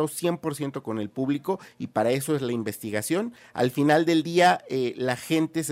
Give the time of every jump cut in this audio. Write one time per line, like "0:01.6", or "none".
0:03.4

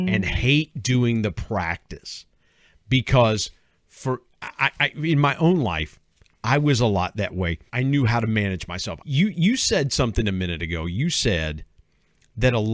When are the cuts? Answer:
0:07.7
0:09.0

